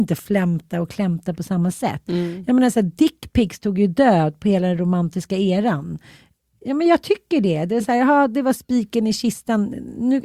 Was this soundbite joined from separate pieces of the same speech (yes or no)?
no